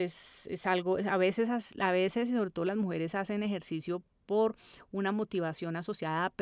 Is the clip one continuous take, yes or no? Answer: yes